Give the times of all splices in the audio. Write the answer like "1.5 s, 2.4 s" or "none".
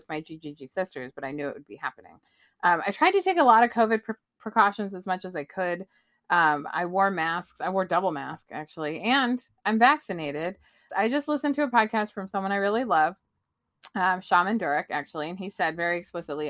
10.9 s

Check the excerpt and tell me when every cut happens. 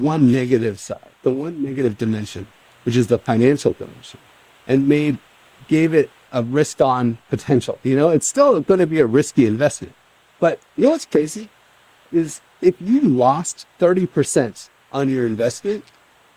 6.3 s

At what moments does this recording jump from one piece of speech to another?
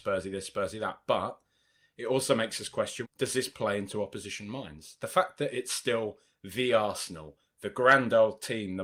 3.0 s

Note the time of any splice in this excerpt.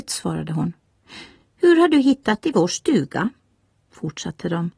none

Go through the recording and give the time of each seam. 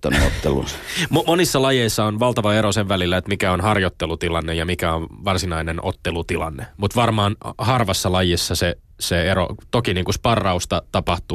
none

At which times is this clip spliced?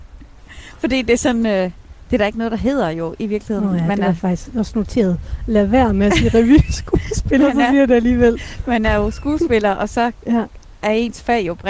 none

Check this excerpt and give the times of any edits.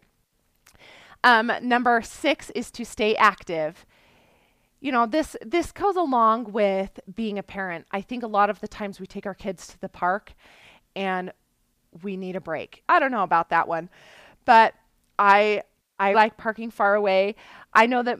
12.8 s, 16.1 s

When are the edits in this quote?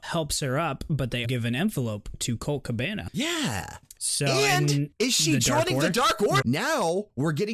1.2 s, 4.0 s, 6.4 s

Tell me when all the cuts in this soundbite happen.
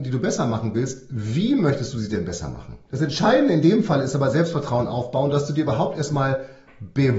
2.9 s

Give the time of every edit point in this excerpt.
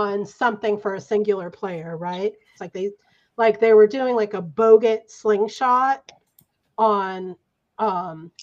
2.6 s

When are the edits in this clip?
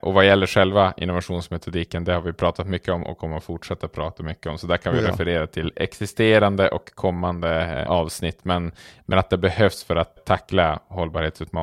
7.9 s, 10.2 s

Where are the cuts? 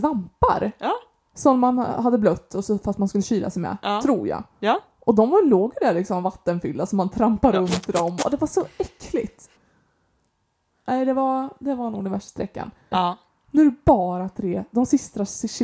9.6 s, 12.9 s

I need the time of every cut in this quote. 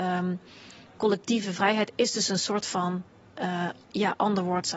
1.0 s

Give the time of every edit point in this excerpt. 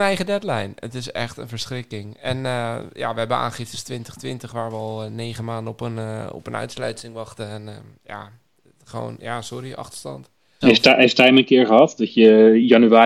10.6 s

